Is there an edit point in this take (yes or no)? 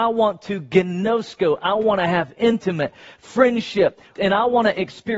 yes